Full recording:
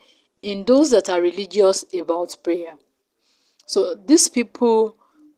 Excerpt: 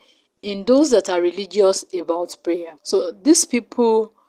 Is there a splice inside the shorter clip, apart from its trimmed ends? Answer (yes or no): yes